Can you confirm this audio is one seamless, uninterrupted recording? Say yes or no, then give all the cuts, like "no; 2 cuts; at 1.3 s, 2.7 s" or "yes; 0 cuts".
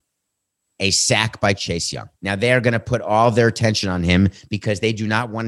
no; 1 cut; at 2.1 s